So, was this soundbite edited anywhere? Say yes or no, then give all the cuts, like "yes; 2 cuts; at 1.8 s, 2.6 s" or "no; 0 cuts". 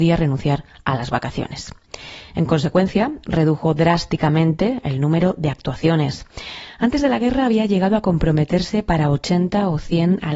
no; 0 cuts